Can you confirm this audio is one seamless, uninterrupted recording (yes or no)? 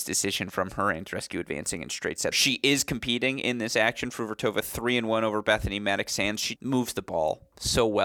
no